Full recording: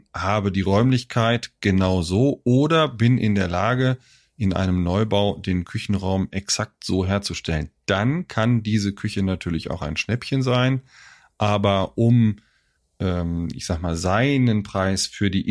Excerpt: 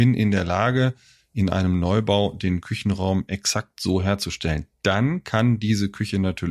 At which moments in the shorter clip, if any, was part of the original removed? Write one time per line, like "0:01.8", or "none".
none